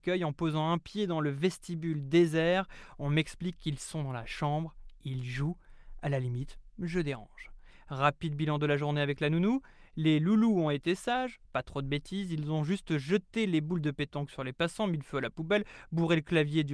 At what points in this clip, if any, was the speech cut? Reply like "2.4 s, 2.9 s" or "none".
11.4 s